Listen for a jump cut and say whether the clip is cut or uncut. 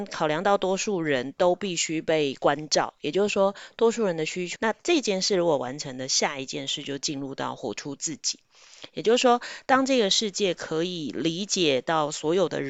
cut